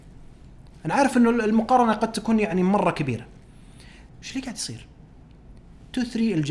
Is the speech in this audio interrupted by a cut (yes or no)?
yes